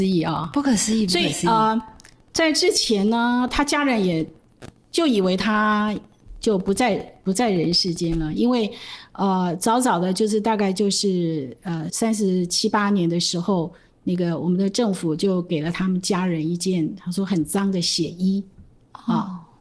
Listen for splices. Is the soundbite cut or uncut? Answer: cut